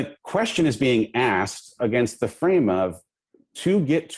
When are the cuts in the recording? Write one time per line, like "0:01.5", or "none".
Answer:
none